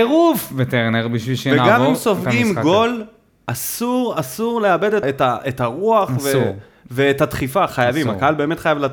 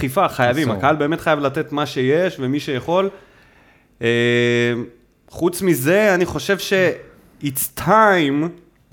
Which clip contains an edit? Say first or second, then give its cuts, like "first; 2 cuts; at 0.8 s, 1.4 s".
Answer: first; 1 cut; at 5.0 s